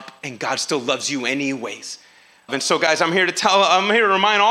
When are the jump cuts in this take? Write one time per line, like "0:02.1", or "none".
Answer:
0:02.5